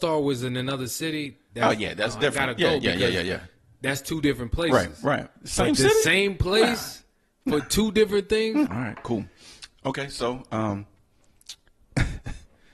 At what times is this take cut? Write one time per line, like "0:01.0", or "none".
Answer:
0:08.7